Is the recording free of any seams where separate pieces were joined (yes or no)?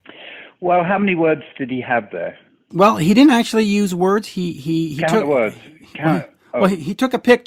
yes